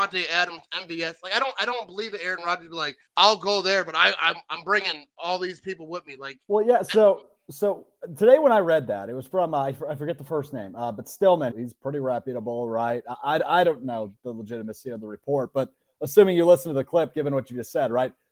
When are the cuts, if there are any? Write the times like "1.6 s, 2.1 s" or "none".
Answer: 3.1 s, 11.5 s

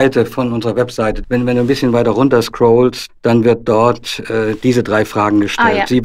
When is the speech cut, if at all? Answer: 1.2 s, 3.1 s

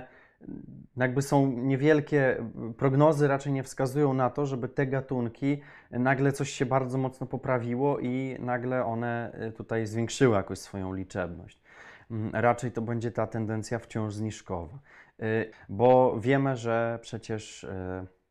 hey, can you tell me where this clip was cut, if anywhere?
15.5 s

